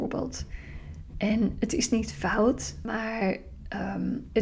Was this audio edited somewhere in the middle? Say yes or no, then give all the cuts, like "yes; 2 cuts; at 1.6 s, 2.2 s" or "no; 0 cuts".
yes; 1 cut; at 2.8 s